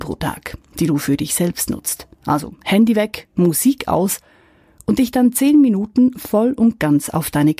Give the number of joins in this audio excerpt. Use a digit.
0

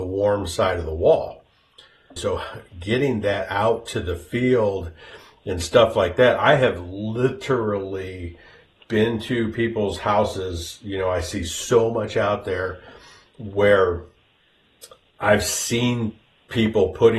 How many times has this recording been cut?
1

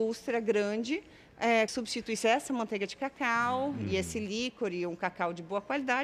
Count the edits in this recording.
1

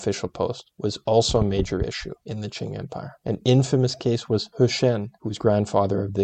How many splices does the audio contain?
2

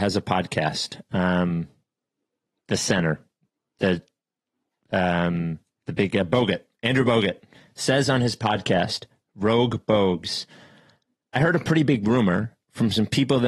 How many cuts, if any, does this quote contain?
0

